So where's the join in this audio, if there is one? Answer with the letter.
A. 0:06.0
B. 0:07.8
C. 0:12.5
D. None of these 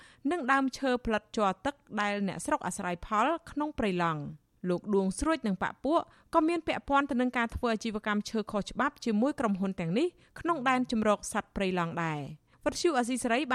C